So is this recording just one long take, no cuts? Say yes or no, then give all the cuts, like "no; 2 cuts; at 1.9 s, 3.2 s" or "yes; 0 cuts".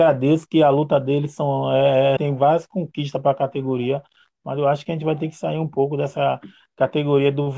no; 1 cut; at 2.2 s